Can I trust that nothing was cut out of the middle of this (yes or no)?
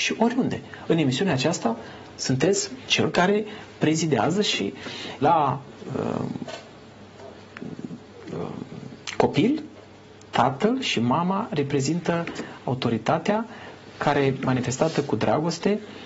no